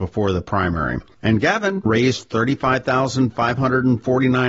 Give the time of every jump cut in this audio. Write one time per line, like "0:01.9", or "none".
0:01.9